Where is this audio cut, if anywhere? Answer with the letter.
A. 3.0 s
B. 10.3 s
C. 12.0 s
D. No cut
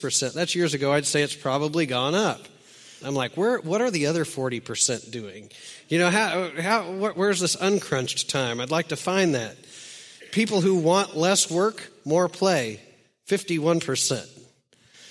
A